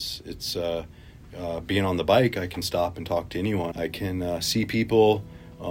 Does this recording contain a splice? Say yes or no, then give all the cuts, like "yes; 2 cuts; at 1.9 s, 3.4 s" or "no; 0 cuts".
yes; 1 cut; at 3.7 s